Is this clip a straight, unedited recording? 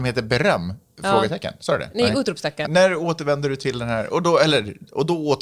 no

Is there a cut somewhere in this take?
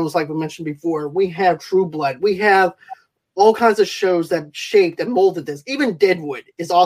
no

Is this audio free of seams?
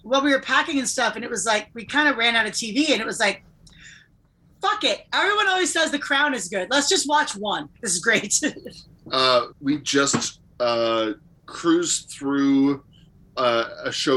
no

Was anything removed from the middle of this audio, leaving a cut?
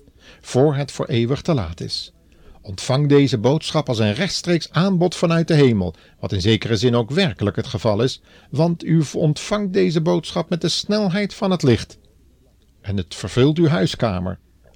no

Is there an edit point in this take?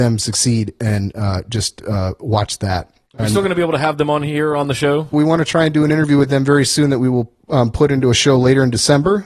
yes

